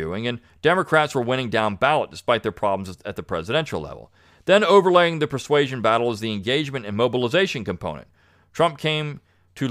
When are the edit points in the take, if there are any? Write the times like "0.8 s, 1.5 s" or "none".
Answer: none

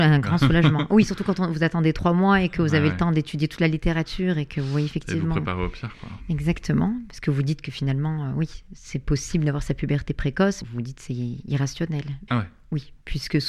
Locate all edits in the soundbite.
10.6 s, 12.3 s

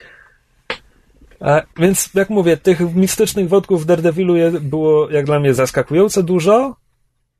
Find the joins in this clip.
1.7 s

